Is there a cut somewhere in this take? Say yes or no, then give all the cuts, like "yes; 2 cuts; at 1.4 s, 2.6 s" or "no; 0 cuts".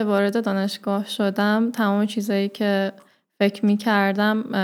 no; 0 cuts